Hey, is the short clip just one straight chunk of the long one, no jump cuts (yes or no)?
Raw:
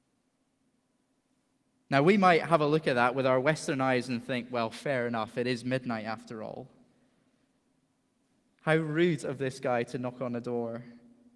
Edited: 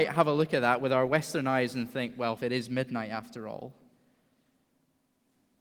no